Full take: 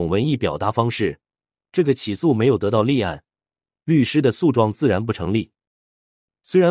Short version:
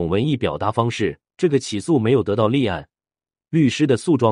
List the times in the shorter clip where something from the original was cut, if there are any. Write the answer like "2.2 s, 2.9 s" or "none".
1.3 s

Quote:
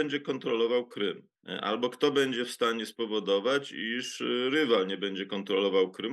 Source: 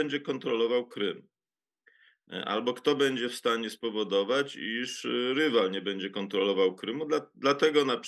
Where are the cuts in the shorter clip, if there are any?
1.4 s

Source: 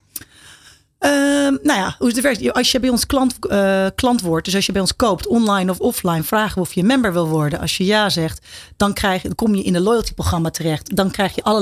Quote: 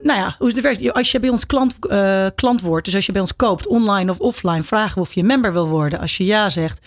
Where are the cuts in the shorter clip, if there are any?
none

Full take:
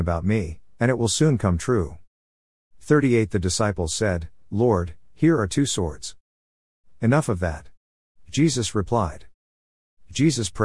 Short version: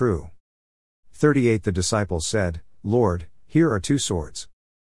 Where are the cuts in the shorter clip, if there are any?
none

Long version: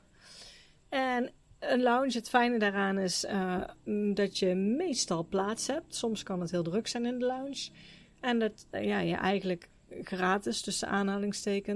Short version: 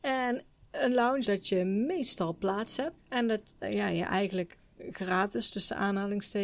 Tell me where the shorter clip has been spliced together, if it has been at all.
1.2 s, 3.0 s

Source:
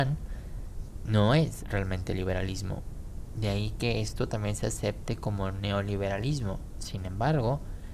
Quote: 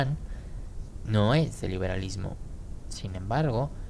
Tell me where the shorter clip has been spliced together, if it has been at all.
1.6 s, 2.8 s

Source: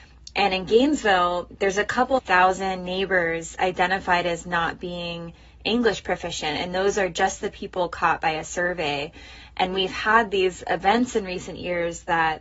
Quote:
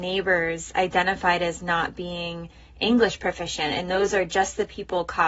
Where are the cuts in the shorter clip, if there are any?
none

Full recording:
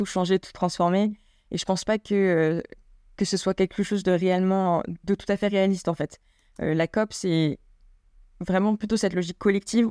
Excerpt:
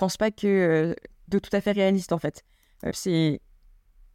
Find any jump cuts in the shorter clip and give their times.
1.3 s, 2.9 s

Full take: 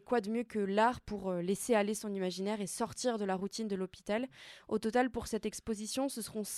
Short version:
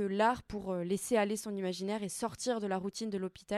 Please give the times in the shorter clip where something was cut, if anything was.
none

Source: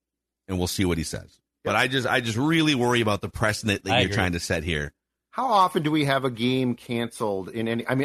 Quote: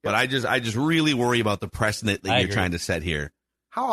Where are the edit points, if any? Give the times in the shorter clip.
none

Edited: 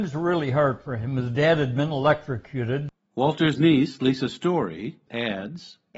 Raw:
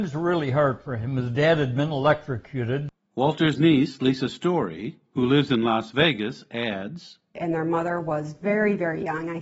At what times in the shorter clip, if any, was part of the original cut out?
5.1 s

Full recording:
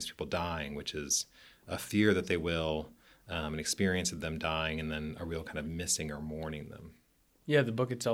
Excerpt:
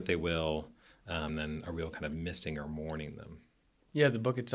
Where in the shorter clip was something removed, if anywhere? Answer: 1.3 s

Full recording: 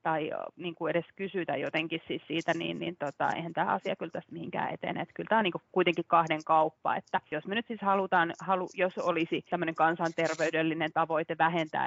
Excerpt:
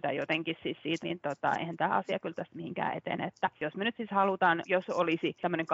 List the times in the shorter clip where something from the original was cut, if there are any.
1.0 s, 3.3 s, 4.6 s

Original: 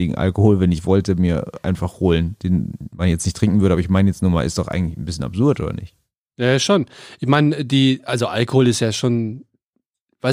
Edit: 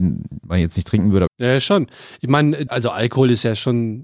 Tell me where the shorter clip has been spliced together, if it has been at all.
1.3 s, 2.7 s

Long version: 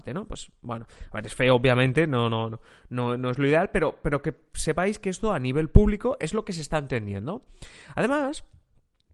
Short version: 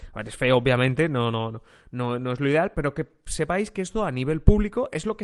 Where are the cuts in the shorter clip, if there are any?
2.7 s

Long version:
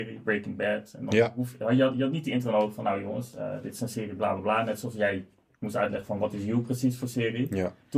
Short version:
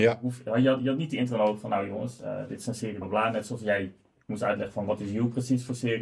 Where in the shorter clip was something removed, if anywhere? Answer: 3.0 s

